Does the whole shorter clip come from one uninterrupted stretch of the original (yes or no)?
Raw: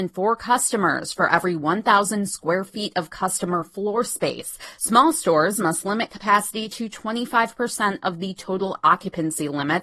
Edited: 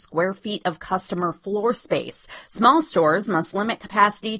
yes